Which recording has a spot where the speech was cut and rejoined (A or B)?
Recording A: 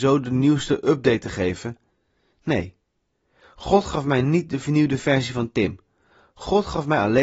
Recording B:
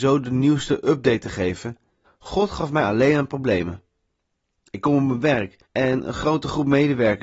B